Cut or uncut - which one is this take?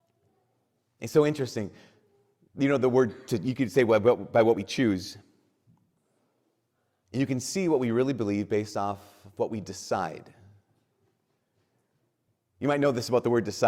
cut